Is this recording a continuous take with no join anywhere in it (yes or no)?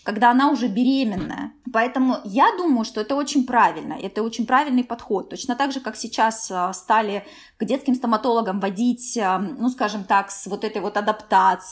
no